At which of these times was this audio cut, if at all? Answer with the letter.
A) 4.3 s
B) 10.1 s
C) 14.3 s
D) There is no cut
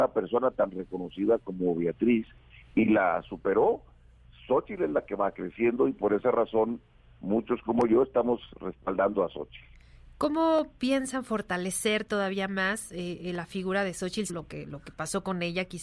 C